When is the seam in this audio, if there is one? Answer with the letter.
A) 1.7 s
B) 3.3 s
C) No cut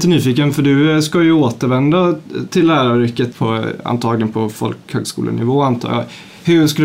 B